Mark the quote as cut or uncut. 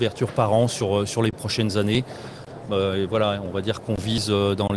cut